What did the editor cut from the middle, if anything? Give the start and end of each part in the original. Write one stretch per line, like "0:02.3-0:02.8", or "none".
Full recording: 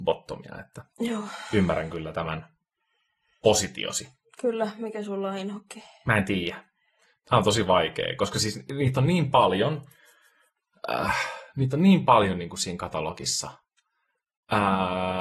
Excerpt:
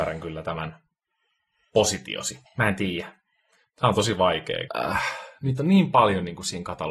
0:04.2-0:05.9
0:08.2-0:10.8